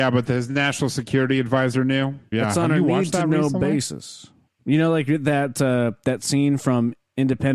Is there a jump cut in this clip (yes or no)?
yes